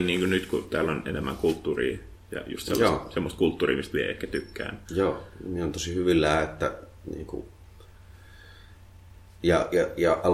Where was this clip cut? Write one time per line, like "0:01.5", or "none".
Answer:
none